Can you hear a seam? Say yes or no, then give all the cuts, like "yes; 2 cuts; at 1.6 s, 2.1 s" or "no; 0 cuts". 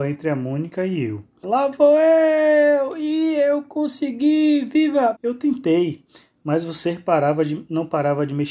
yes; 2 cuts; at 1.4 s, 5.1 s